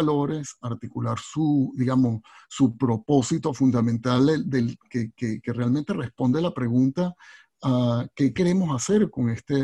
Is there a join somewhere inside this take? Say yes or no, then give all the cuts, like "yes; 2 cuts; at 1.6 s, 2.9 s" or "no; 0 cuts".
no; 0 cuts